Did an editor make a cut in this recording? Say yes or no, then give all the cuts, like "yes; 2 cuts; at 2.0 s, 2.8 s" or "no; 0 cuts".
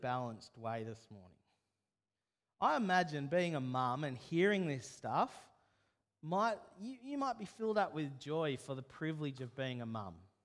no; 0 cuts